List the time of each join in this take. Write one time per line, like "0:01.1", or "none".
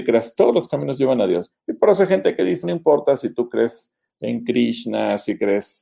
0:01.5
0:02.6